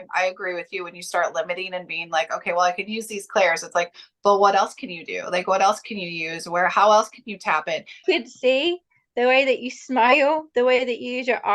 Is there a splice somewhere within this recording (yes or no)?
yes